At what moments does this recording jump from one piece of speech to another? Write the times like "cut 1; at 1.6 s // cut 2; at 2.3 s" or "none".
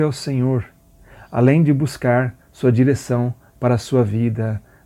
none